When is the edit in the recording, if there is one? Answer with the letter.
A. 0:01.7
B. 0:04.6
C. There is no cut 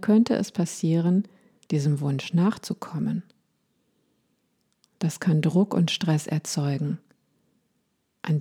A